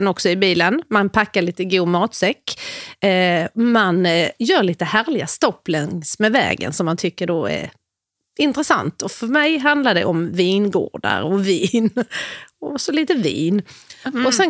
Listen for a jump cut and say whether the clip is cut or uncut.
uncut